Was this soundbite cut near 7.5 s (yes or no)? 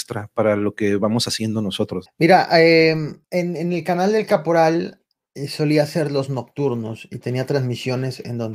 no